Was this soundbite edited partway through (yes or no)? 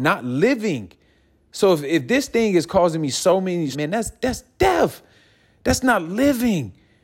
yes